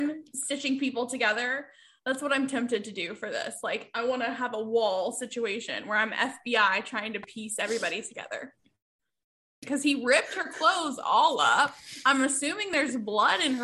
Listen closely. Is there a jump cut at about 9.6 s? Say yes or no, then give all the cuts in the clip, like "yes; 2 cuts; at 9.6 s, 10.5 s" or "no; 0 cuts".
yes; 1 cut; at 9.6 s